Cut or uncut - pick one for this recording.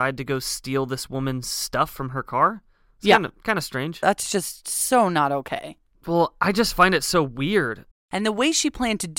cut